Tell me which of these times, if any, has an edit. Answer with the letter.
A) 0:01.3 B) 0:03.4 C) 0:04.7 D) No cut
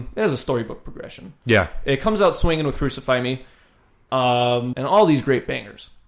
C